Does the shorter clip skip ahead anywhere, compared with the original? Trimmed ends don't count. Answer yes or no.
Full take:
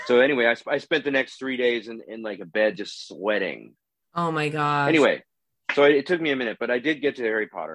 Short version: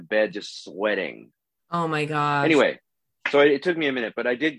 no